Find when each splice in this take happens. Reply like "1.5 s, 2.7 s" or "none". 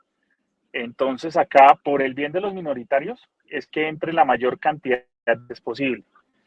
1.8 s, 3.4 s